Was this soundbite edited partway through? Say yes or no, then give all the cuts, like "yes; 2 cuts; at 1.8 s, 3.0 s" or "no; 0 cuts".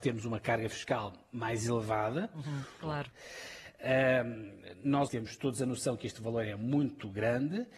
yes; 2 cuts; at 2.8 s, 5.1 s